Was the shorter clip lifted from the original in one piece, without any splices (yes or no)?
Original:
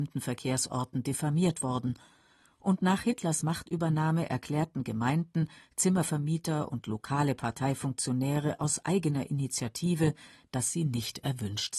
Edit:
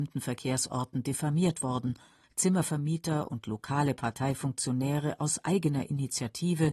no